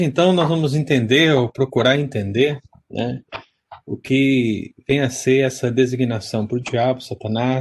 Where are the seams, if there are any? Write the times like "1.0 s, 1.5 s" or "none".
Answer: none